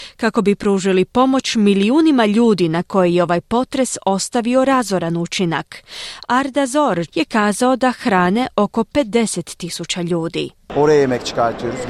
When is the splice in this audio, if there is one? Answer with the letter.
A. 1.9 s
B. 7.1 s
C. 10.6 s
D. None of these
B